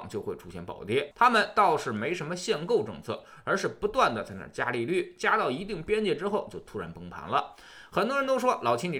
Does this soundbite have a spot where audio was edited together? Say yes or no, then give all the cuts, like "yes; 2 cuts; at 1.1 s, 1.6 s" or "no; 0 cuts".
yes; 1 cut; at 1.1 s